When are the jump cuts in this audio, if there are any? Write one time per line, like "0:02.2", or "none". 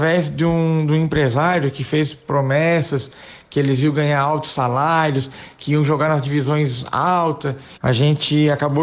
0:07.8